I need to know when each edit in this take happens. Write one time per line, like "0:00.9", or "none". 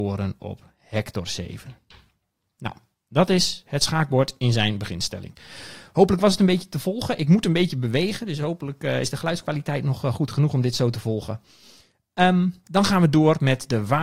0:12.6

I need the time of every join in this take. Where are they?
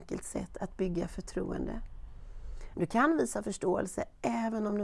0:02.7

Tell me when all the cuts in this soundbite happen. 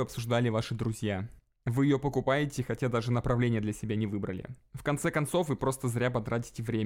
none

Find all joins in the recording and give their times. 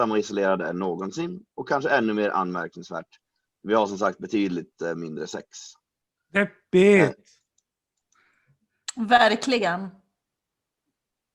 none

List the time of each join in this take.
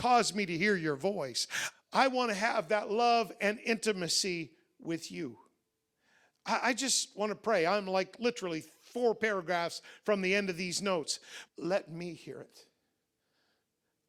0:01.7
0:11.5

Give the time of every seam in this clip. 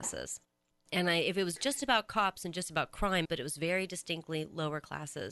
0:03.2

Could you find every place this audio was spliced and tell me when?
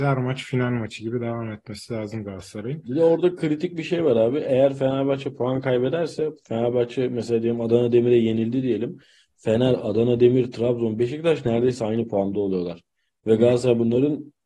none

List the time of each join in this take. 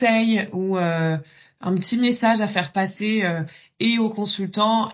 none

